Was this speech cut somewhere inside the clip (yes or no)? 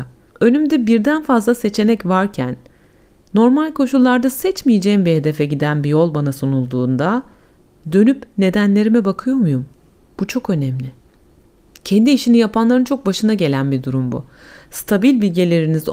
no